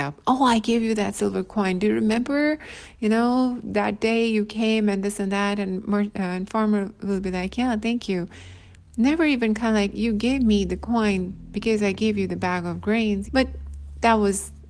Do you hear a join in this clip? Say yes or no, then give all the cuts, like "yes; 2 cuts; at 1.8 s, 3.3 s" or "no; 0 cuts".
yes; 1 cut; at 13.2 s